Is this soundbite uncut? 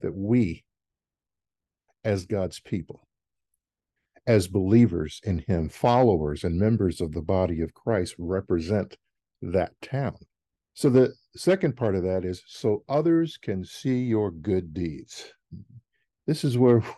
no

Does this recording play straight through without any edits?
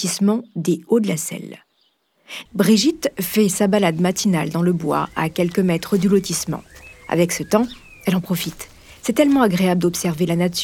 no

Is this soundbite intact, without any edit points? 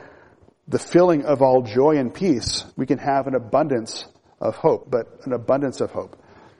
no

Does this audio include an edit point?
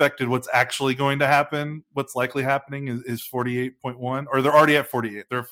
no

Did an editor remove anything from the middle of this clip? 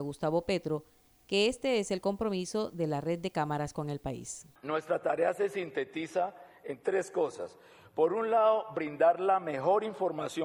no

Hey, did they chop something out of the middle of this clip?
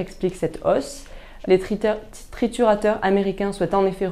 yes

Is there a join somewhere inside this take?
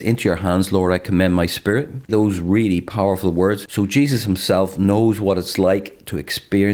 yes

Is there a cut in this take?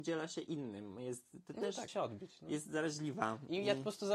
yes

